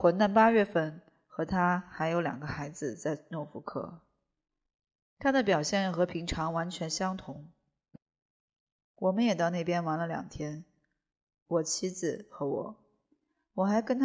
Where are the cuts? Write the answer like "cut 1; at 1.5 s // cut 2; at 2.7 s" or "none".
none

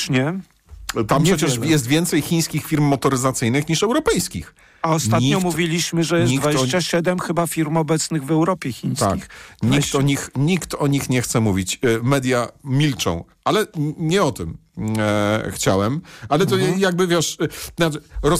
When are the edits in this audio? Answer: none

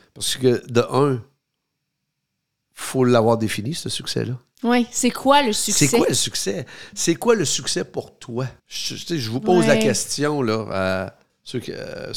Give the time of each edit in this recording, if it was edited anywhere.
cut 1; at 8.6 s

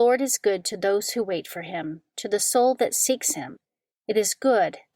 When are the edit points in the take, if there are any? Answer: none

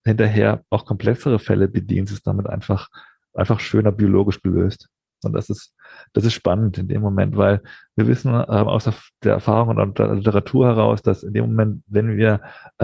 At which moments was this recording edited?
cut 1; at 5.2 s

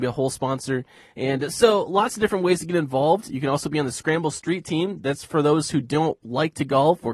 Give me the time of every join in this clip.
none

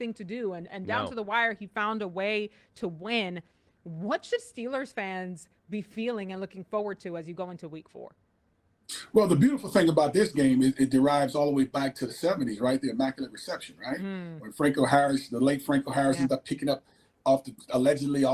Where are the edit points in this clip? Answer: none

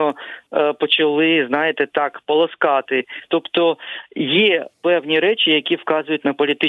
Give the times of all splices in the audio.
cut 1; at 3.3 s

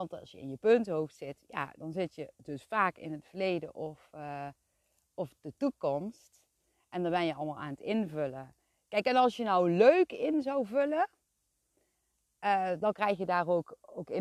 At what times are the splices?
none

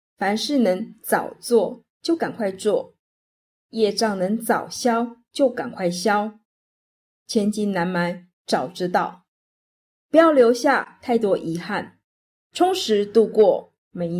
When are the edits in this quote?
none

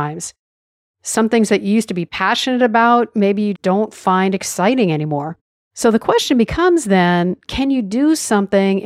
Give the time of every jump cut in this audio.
cut 1; at 3.5 s // cut 2; at 5.7 s

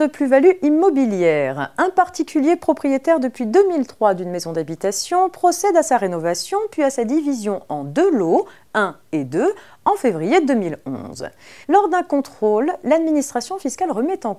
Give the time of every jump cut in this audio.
cut 1; at 11.6 s

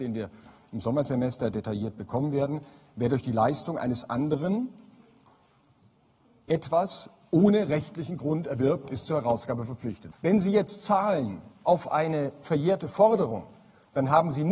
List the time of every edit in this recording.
cut 1; at 10.1 s

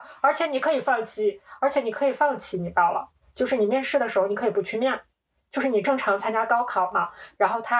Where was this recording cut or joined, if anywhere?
none

